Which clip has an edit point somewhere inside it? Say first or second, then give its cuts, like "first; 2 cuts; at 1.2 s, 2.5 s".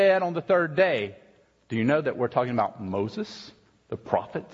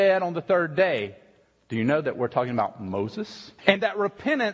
second; 1 cut; at 3.6 s